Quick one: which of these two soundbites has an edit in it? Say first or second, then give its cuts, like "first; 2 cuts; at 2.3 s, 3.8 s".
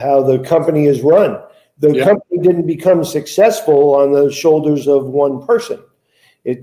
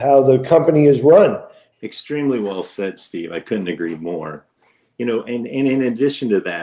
second; 1 cut; at 1.7 s